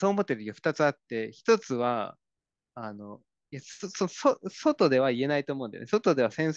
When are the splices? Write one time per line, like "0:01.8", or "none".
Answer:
none